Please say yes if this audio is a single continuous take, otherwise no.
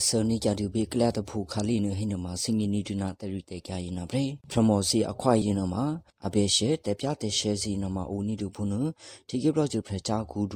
no